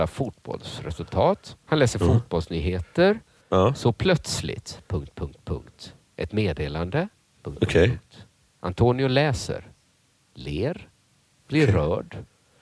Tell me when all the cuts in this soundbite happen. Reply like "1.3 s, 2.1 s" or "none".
1.6 s